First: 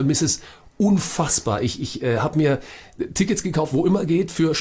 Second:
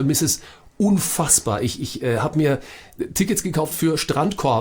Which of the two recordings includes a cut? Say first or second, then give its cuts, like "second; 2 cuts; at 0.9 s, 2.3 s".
second; 1 cut; at 3.7 s